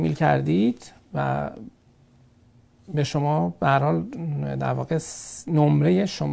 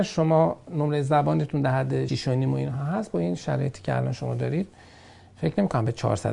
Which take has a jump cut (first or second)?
second